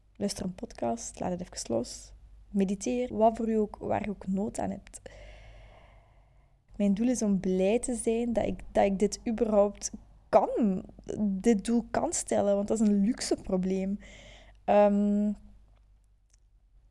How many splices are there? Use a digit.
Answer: 2